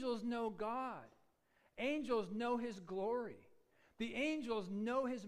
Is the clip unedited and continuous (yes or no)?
yes